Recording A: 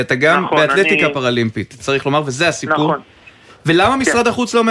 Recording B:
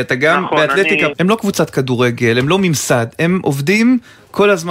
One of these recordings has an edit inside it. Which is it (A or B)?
B